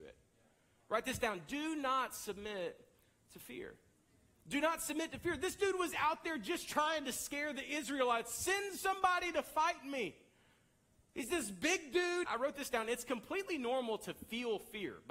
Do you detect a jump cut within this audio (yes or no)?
yes